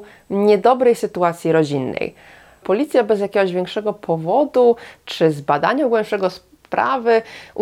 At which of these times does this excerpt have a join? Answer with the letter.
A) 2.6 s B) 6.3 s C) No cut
A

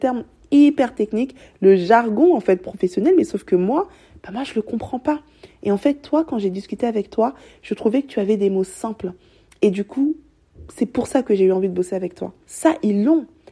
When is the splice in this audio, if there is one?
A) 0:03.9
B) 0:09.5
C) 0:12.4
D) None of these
C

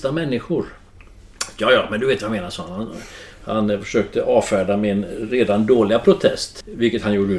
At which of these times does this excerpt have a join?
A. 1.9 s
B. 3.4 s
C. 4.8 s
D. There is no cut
D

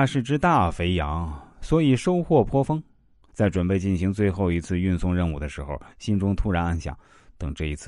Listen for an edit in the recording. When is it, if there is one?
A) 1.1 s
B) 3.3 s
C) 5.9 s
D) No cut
B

